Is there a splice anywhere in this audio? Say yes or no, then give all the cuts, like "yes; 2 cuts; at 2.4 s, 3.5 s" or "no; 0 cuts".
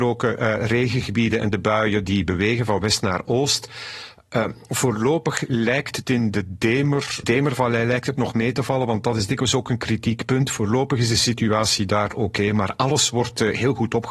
yes; 1 cut; at 7.2 s